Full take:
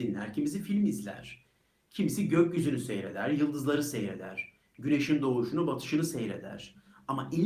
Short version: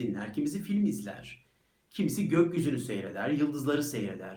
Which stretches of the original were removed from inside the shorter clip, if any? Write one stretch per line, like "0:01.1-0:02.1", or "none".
none